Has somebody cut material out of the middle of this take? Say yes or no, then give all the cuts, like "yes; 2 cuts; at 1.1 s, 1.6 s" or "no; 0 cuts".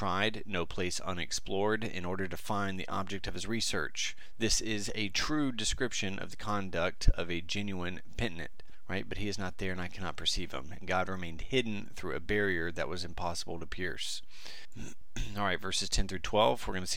yes; 1 cut; at 10.8 s